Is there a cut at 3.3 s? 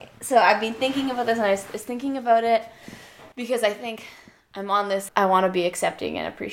yes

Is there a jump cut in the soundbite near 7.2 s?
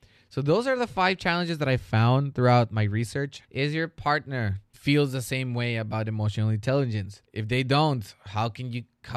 yes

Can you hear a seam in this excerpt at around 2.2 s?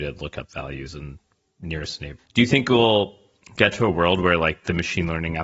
yes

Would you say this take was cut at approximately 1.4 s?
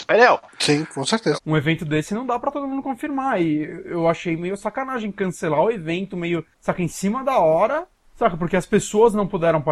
yes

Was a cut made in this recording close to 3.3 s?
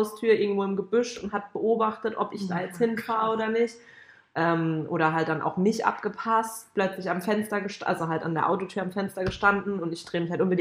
no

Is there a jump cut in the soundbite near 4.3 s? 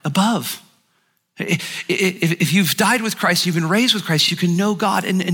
no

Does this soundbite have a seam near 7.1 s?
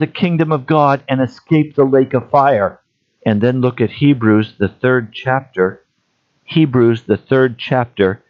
no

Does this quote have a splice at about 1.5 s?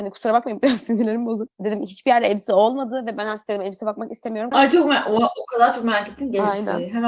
no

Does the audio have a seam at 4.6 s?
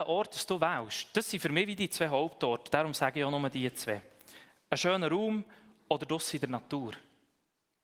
no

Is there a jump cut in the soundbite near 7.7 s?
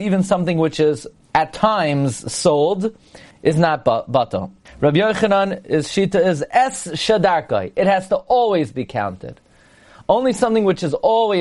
no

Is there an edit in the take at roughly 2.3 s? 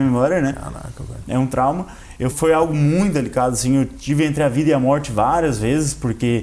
yes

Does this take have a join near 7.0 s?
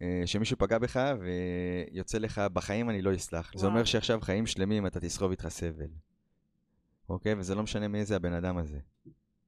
yes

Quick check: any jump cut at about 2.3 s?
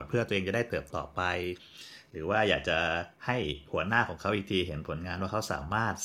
no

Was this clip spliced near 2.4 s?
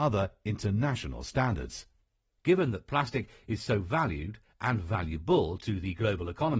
yes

